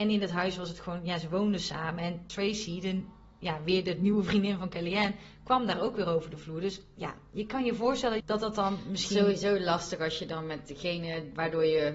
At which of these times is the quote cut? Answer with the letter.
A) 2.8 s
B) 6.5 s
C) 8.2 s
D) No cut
C